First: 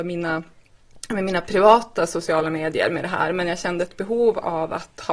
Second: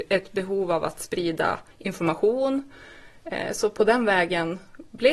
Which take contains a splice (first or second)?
second